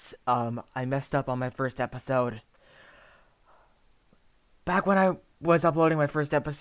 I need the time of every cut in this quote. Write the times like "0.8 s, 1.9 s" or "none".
none